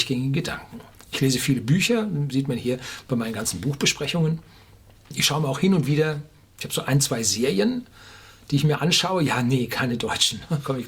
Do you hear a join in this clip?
no; 0 cuts

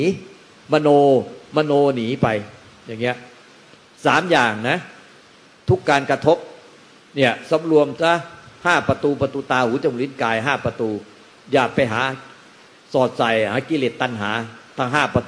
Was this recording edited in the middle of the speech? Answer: no; 0 cuts

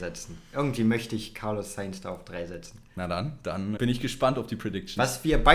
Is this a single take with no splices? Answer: no; 1 cut; at 3.8 s

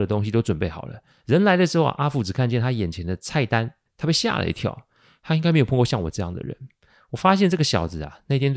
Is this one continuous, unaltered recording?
no; 2 cuts; at 1.2 s, 3.9 s

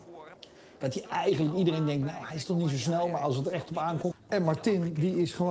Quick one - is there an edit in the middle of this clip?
yes; 1 cut; at 4.1 s

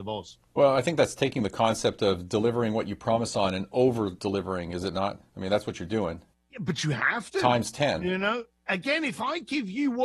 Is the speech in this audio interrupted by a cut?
no; 0 cuts

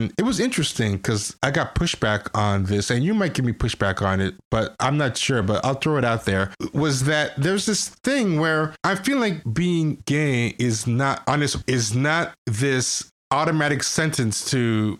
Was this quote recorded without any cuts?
yes; 0 cuts

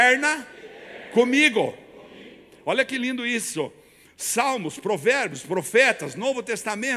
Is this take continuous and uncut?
yes; 0 cuts

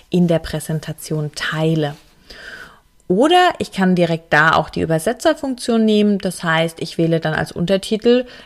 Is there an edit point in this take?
no; 0 cuts

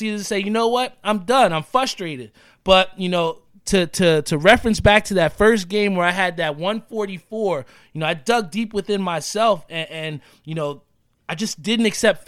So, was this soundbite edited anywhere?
no; 0 cuts

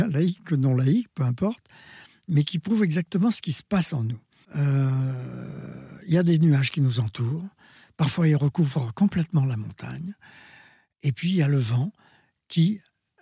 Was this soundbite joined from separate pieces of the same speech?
yes; 1 cut; at 4.4 s

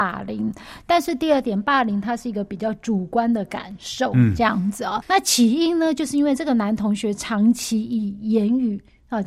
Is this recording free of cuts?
no; 1 cut; at 5.0 s

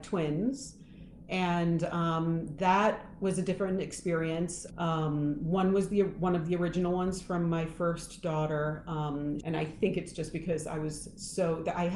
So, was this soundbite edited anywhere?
yes; 2 cuts; at 4.7 s, 9.4 s

